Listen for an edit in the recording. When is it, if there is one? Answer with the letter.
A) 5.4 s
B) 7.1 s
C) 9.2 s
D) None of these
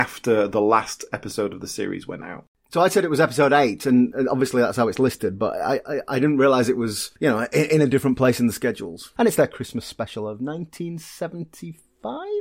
C